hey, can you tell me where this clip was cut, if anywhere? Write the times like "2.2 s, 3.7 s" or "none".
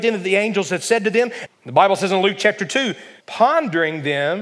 1.5 s, 3.2 s